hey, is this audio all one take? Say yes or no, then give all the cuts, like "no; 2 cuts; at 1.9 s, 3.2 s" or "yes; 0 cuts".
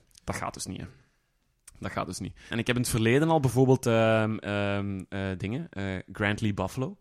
no; 1 cut; at 2.5 s